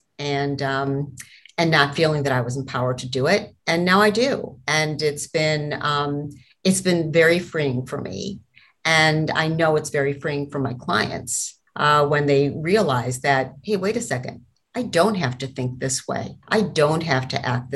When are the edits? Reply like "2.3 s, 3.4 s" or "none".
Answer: 3.6 s, 11.7 s, 16.4 s